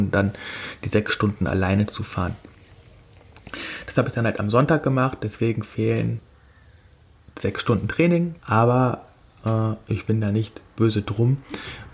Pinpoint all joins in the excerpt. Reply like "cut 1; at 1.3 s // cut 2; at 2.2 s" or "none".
cut 1; at 8.4 s